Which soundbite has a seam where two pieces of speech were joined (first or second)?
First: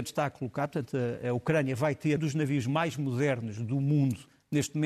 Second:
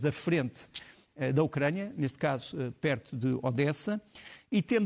first